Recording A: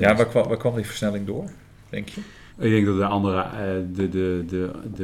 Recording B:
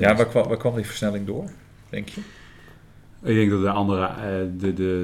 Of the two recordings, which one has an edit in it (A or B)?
A